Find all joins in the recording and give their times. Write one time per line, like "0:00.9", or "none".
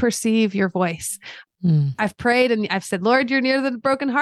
0:01.5